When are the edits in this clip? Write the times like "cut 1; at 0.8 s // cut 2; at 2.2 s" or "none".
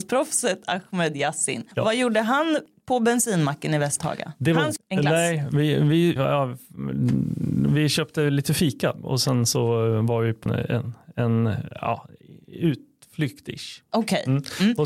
cut 1; at 4.8 s // cut 2; at 6.2 s // cut 3; at 10.5 s